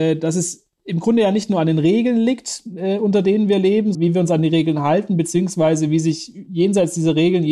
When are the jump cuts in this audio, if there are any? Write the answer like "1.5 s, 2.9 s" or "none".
3.9 s